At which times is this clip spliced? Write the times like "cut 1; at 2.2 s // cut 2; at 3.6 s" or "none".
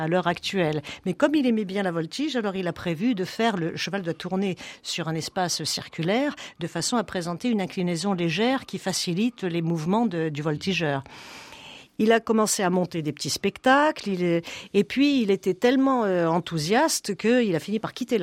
none